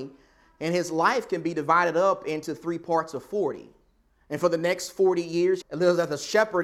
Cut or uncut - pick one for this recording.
cut